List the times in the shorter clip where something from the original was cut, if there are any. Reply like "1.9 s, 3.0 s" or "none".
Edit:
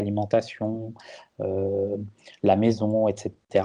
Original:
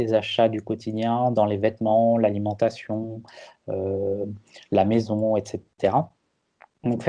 none